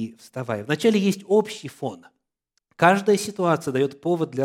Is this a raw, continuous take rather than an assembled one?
no; 1 cut; at 2.6 s

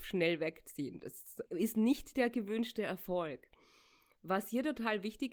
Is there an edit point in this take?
yes; 1 cut; at 1.5 s

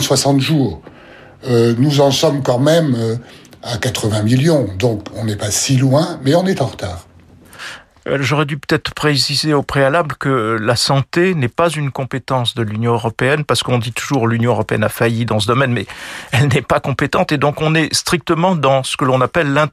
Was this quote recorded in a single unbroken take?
yes; 0 cuts

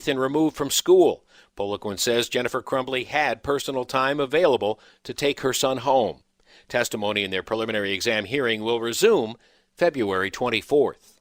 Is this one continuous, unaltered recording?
yes; 0 cuts

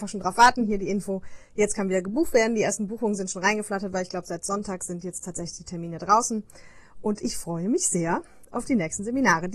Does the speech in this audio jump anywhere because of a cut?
no; 0 cuts

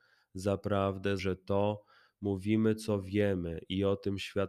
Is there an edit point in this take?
yes; 1 cut; at 1.2 s

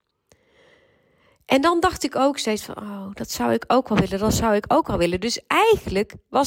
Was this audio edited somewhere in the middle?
no; 0 cuts

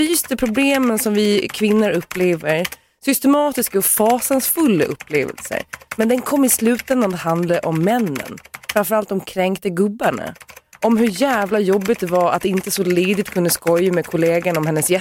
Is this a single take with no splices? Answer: yes; 0 cuts

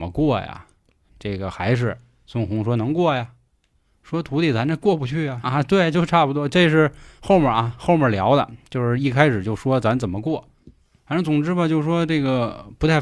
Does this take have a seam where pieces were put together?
yes; 1 cut; at 5.4 s

